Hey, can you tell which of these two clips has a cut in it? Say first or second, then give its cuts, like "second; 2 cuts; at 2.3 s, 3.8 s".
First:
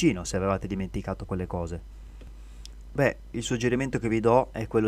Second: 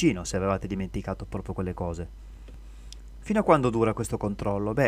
first; 2 cuts; at 1.3 s, 3.0 s